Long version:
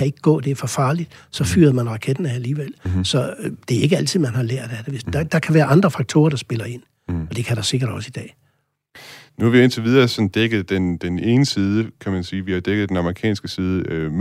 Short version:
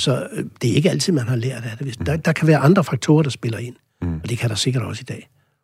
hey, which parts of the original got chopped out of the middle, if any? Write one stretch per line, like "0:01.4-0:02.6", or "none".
none